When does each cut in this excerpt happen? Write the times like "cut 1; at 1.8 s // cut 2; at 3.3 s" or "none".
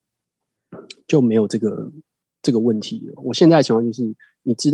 cut 1; at 3.2 s